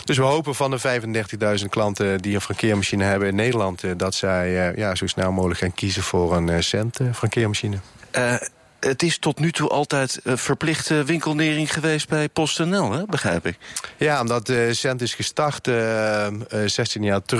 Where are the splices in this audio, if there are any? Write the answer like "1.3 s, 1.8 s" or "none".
none